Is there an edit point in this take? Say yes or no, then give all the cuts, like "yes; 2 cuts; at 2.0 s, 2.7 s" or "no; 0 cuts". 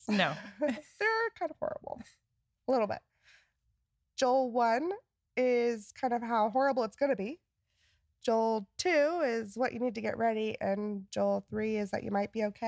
no; 0 cuts